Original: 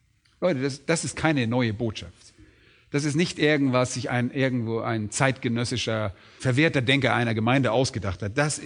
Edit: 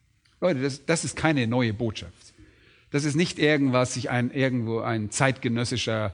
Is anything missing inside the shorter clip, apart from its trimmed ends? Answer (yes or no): no